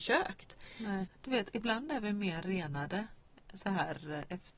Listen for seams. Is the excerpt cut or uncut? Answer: cut